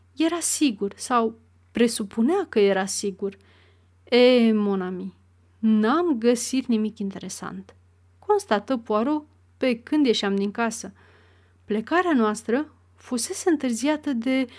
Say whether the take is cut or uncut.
uncut